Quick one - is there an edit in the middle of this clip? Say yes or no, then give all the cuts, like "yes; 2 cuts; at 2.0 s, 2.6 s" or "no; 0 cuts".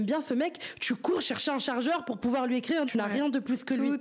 yes; 1 cut; at 2.9 s